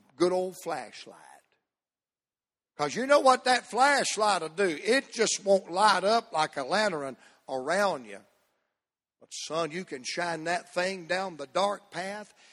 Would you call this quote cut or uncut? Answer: uncut